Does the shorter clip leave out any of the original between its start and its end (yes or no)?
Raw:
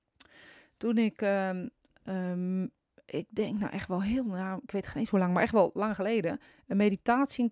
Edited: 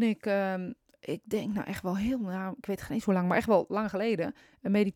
yes